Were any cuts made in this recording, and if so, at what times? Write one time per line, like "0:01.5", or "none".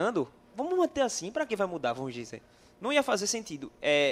none